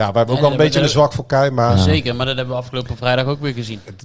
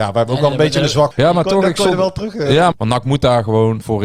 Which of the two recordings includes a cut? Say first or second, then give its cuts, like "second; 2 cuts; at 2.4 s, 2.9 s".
second; 2 cuts; at 1.1 s, 2.7 s